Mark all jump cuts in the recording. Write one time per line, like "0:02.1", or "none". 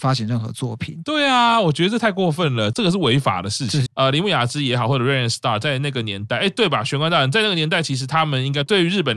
0:02.7
0:03.9